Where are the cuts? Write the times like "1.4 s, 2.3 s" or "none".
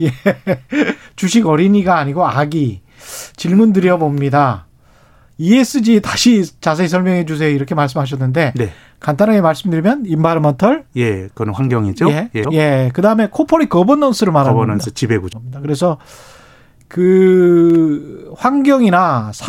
12.4 s, 15.3 s